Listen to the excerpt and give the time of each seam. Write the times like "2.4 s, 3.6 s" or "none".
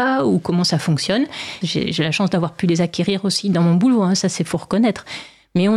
1.6 s